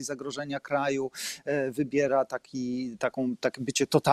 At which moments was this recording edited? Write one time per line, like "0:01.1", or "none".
none